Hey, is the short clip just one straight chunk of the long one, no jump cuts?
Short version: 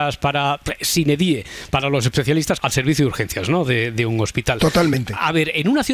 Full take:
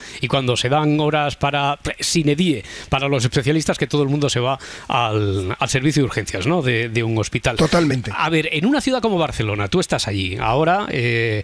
no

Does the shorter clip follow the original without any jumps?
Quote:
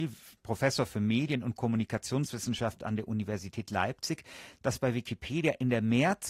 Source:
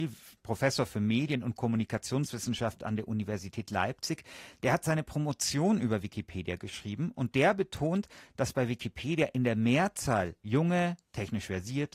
no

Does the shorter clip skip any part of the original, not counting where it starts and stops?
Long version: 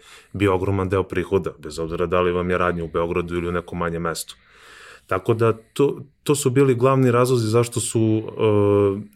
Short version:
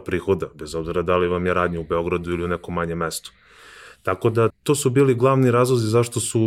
yes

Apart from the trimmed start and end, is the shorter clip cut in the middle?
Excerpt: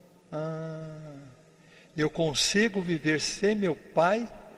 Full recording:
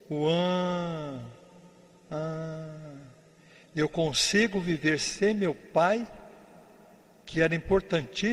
no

